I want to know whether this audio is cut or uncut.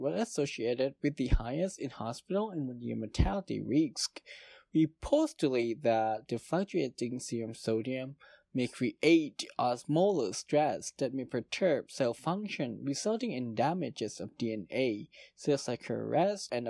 uncut